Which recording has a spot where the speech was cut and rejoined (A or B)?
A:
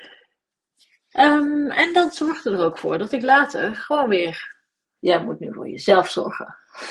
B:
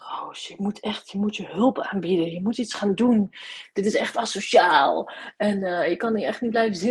A